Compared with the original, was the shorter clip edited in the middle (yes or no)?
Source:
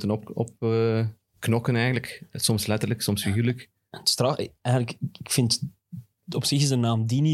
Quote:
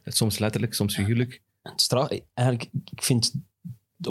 no